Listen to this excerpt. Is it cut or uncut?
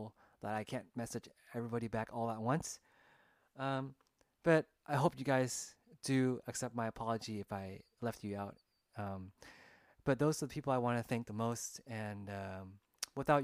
uncut